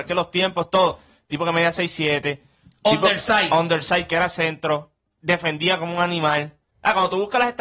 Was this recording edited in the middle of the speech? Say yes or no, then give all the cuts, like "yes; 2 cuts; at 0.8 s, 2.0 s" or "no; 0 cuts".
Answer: no; 0 cuts